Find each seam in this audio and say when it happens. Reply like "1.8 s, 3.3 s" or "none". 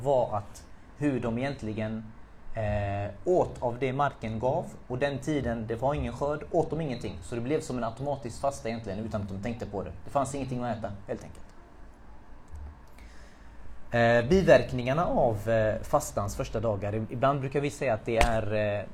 none